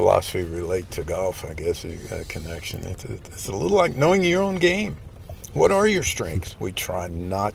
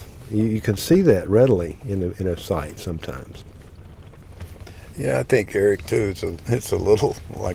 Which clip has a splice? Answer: first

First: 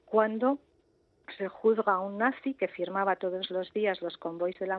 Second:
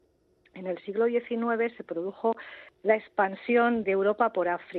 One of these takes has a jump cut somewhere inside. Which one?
second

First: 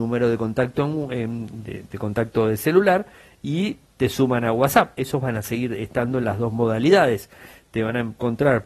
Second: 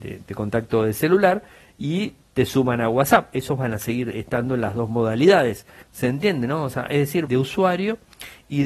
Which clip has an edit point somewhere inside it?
second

